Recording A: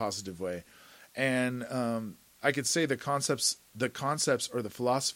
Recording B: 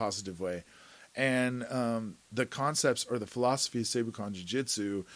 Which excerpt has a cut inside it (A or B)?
B